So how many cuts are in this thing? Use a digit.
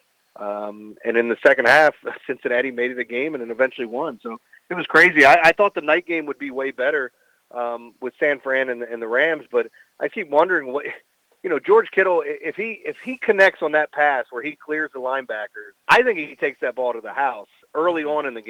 2